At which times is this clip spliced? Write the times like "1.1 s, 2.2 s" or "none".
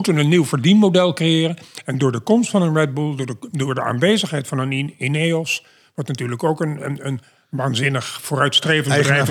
none